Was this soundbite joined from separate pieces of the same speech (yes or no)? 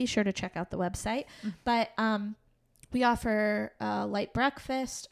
no